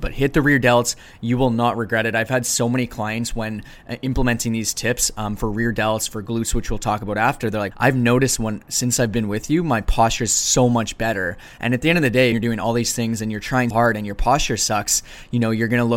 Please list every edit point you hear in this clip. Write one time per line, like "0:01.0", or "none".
0:07.7
0:12.3
0:13.7